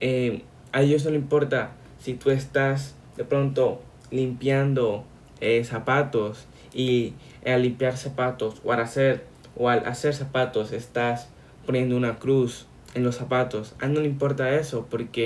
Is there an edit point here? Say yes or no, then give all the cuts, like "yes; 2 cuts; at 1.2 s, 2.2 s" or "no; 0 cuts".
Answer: no; 0 cuts